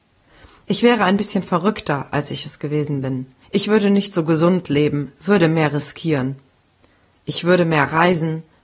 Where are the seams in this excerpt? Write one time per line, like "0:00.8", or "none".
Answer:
0:03.4